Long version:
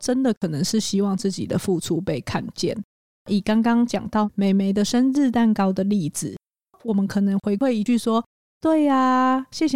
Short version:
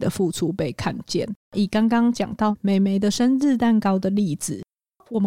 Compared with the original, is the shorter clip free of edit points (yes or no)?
no